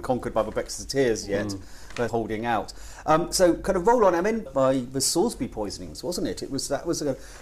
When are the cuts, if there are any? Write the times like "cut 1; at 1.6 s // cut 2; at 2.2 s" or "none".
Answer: cut 1; at 2.1 s // cut 2; at 4.5 s